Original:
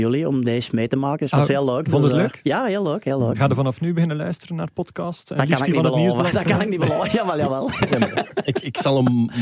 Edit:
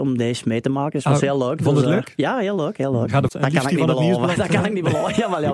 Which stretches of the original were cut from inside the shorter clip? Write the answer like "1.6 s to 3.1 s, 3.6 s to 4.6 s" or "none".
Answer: 3.6 s to 5.2 s

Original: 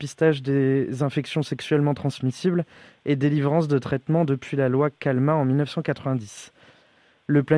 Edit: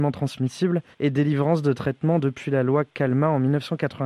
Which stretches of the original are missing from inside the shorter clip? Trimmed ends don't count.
2.7 s to 3.0 s

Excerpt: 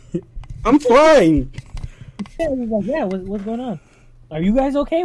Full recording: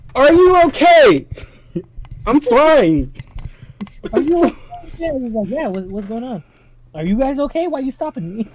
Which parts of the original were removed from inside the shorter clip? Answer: 4.0 s to 5.0 s

